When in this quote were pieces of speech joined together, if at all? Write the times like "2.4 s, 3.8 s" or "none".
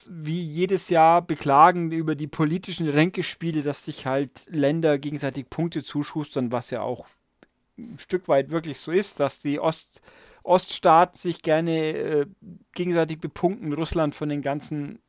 none